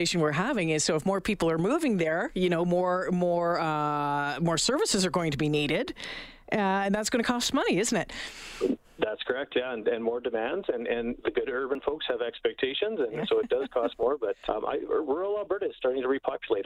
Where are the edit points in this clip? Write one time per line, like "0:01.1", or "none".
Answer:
0:13.2
0:14.4